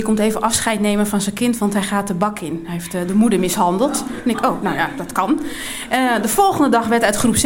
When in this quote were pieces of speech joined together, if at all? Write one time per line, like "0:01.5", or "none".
none